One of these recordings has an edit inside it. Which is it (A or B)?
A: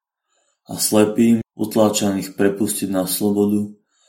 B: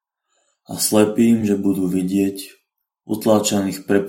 A